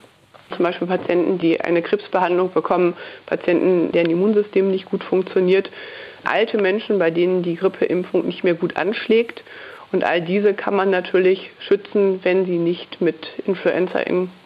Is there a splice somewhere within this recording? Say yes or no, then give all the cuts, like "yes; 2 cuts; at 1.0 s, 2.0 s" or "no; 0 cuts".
no; 0 cuts